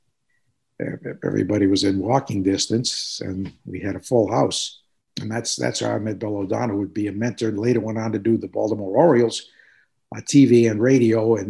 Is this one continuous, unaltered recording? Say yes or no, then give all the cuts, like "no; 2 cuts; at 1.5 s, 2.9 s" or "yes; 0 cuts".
yes; 0 cuts